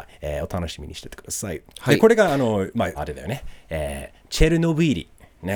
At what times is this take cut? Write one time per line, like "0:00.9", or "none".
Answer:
0:01.7
0:02.9